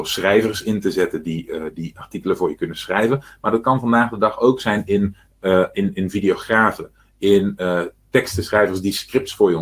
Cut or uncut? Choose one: uncut